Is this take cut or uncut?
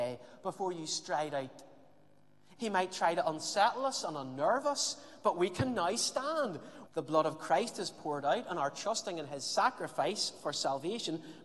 cut